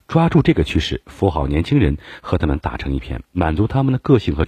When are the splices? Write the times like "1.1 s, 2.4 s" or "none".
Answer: none